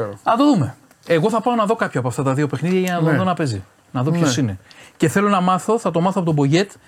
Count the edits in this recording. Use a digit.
0